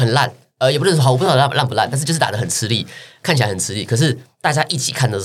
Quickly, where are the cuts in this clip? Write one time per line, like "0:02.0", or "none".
none